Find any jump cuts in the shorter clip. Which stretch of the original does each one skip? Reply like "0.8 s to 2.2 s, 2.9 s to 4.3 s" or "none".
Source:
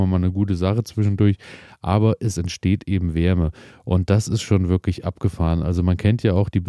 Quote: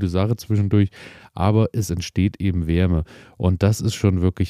none